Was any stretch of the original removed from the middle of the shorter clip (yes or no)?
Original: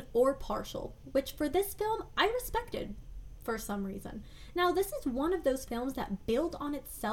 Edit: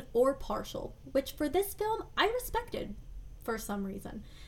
no